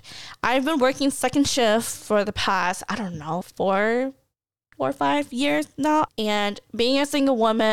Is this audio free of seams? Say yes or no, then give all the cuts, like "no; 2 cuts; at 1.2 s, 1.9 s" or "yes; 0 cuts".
no; 2 cuts; at 3.4 s, 6.1 s